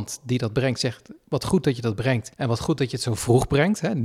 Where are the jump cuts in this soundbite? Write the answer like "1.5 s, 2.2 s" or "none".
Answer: 2.3 s